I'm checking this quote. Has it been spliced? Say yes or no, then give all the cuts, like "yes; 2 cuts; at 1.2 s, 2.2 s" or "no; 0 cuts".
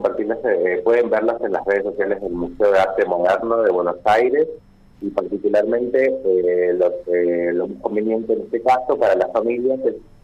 no; 0 cuts